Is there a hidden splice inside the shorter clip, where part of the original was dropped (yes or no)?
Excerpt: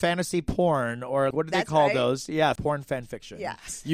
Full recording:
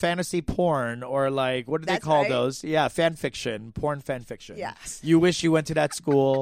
yes